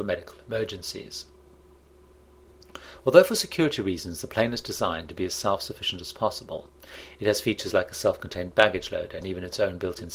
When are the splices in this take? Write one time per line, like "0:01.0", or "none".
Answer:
none